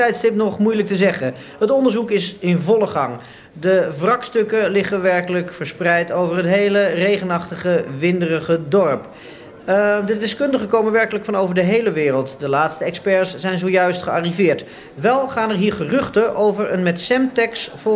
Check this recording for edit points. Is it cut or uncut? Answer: uncut